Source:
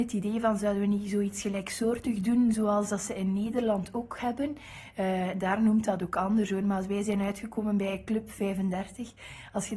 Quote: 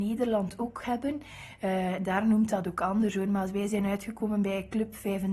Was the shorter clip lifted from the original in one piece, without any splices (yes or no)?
yes